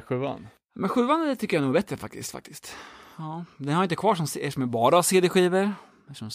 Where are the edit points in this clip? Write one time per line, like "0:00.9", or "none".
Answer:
none